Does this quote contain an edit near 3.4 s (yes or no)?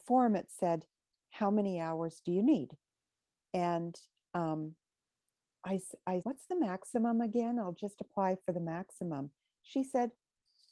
yes